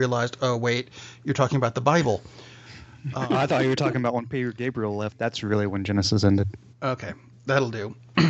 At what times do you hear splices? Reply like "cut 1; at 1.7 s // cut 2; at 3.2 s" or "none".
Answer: cut 1; at 6.7 s